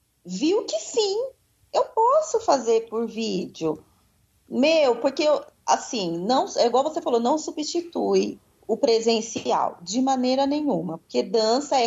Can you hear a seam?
no; 0 cuts

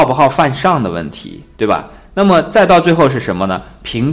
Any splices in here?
no; 0 cuts

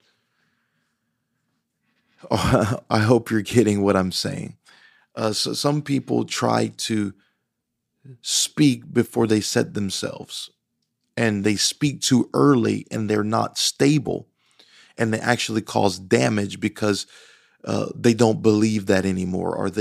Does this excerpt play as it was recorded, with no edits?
yes; 0 cuts

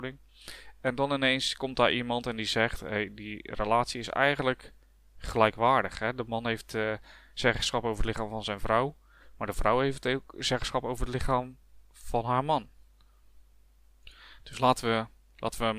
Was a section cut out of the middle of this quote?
no; 0 cuts

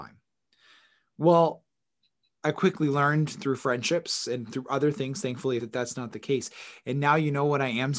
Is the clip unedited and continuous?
no; 1 cut; at 5.6 s

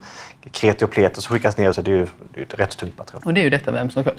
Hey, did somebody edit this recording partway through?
yes; 2 cuts; at 1.7 s, 3.2 s

